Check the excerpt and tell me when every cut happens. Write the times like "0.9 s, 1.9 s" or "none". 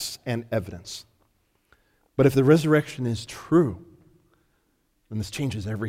2.0 s